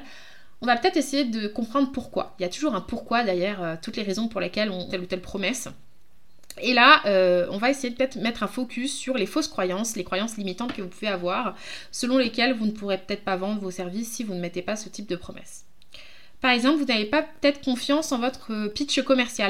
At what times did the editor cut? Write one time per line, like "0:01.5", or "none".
0:04.9